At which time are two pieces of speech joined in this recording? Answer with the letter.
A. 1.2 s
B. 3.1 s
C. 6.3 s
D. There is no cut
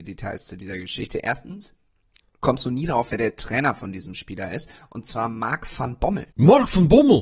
C